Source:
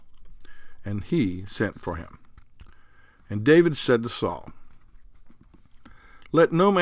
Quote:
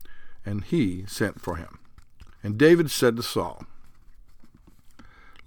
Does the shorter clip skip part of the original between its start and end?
yes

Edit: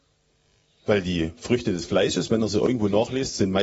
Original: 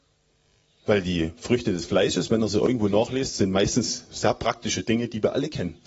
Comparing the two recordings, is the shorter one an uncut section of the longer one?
yes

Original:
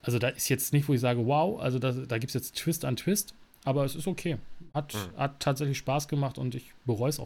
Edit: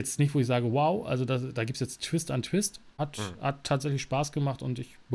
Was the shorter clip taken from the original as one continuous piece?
no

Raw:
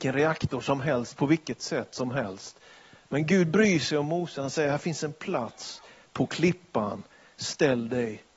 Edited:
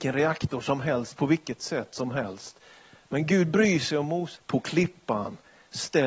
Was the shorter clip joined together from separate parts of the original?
yes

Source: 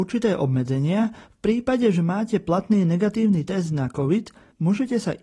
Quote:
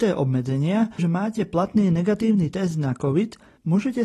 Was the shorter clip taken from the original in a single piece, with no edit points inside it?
no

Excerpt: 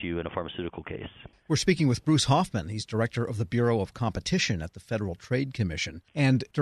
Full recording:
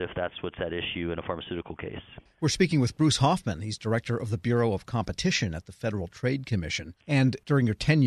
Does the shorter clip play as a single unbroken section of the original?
yes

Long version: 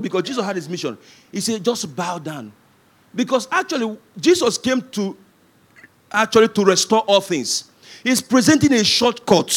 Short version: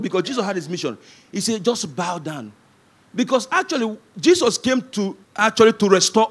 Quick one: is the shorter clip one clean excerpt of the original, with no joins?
no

